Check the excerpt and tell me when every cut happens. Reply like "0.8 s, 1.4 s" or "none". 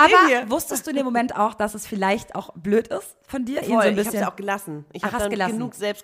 3.6 s